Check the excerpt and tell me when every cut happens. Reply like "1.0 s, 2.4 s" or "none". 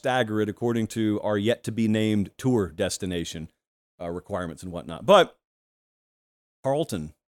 none